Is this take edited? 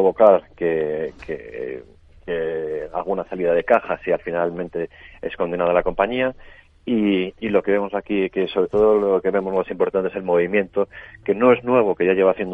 no; 0 cuts

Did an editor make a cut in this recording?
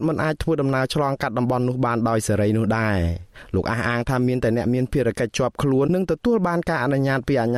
yes; 1 cut; at 5.9 s

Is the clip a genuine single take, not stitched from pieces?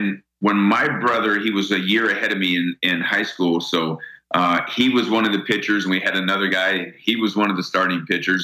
yes; 0 cuts

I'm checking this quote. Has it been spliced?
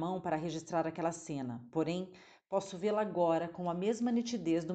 no; 0 cuts

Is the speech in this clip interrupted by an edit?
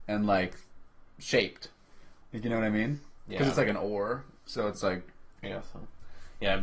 yes; 1 cut; at 2.2 s

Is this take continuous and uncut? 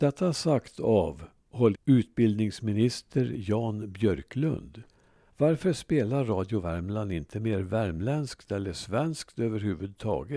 no; 2 cuts; at 1.7 s, 5.3 s

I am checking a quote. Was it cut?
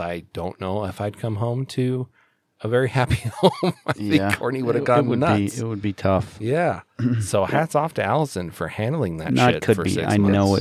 no; 0 cuts

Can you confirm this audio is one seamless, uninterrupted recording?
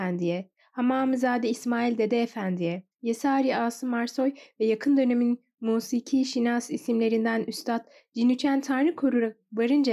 no; 1 cut; at 2.9 s

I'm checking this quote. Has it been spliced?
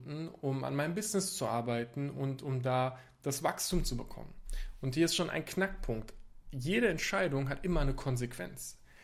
no; 0 cuts

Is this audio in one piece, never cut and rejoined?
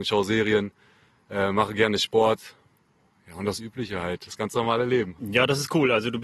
no; 1 cut; at 5.2 s

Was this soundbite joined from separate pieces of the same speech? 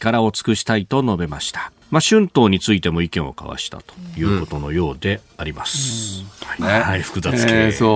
yes; 2 cuts; at 1.8 s, 6.6 s

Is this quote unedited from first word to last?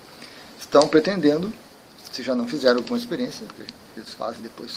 no; 1 cut; at 3.5 s

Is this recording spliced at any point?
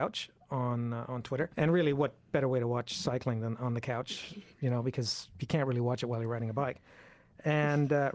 yes; 2 cuts; at 1.5 s, 4.5 s

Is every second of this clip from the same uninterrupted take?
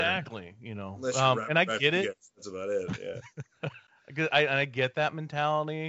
yes; 0 cuts

